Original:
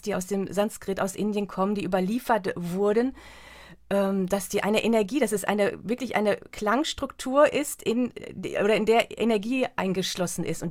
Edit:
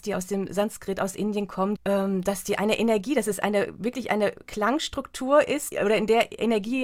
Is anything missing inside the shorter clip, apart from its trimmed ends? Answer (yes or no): yes